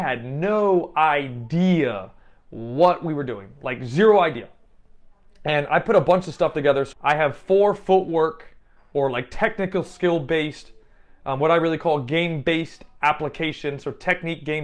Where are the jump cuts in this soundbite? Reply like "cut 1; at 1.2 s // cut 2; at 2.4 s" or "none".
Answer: cut 1; at 6.9 s

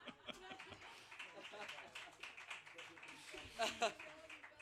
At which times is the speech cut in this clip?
none

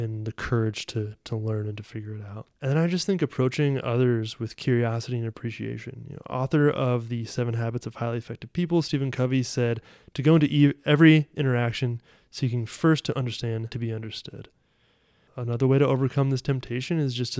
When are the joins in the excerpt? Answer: cut 1; at 2.5 s // cut 2; at 13.7 s

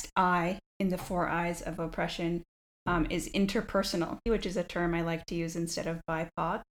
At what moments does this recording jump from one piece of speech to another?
cut 1; at 4.3 s

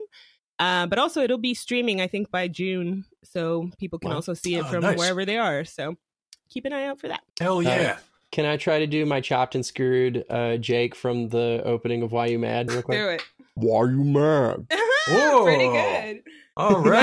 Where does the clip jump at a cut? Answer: cut 1; at 7.3 s // cut 2; at 12.7 s

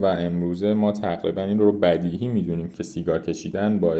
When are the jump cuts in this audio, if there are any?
none

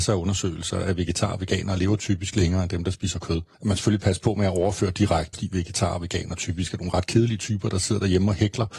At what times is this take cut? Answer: cut 1; at 3.5 s // cut 2; at 5.3 s

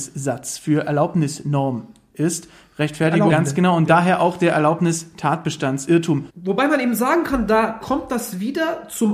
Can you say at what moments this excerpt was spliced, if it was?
cut 1; at 3.3 s // cut 2; at 6.3 s

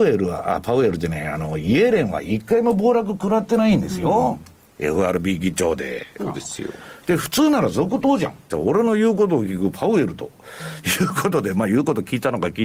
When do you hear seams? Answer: cut 1; at 6.2 s // cut 2; at 8.5 s

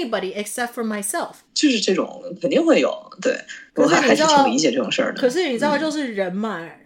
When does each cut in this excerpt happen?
cut 1; at 1.4 s

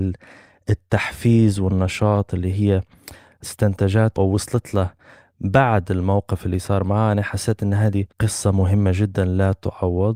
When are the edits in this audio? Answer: cut 1; at 4.2 s // cut 2; at 8.1 s

